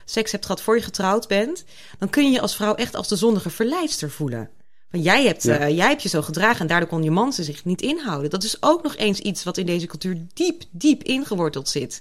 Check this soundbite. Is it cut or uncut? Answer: uncut